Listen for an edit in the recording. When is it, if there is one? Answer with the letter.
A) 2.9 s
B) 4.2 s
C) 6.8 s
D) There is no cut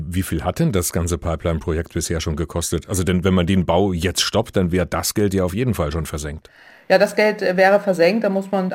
D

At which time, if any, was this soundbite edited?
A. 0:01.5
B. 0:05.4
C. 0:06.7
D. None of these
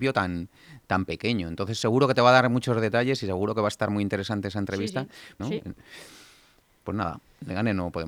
B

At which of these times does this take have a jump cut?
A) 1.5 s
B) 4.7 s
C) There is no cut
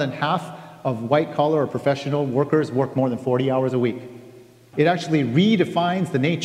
B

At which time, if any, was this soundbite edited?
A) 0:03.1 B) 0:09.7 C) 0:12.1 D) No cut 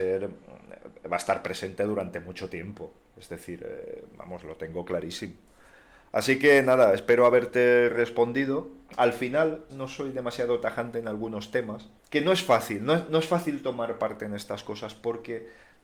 B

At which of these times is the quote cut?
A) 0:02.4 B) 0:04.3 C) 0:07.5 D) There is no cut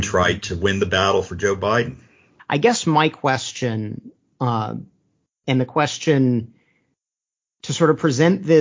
A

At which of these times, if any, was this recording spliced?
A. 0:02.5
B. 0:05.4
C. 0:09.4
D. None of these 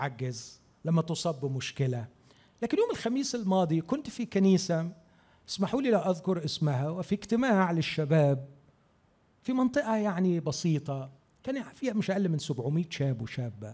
D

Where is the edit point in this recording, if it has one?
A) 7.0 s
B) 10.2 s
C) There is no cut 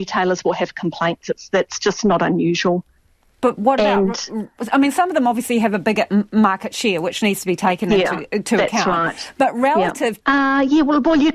B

